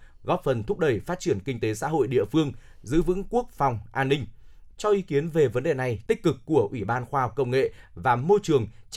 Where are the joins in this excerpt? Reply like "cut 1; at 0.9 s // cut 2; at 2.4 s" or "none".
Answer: cut 1; at 4.7 s // cut 2; at 6.1 s

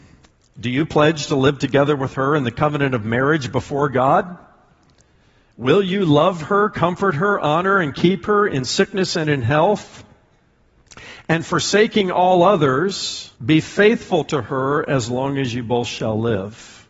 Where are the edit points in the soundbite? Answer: cut 1; at 13.4 s

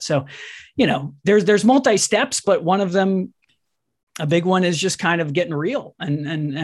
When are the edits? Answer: none

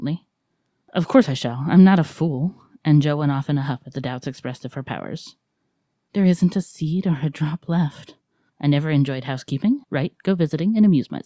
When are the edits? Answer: cut 1; at 6.1 s // cut 2; at 8.5 s // cut 3; at 9.8 s

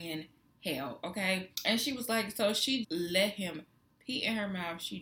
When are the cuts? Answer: cut 1; at 1.5 s // cut 2; at 2.8 s

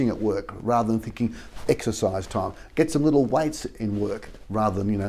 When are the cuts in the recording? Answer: none

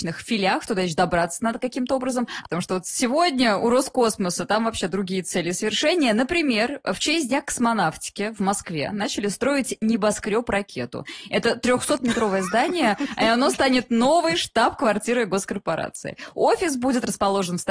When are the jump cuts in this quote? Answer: cut 1; at 2.4 s

